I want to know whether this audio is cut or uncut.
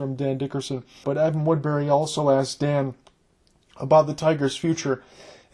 cut